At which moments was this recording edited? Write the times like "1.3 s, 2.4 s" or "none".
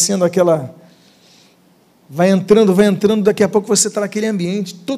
none